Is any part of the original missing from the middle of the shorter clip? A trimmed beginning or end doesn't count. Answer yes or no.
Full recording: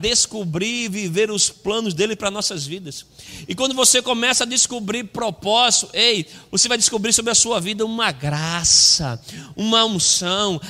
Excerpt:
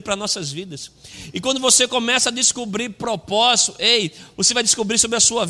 no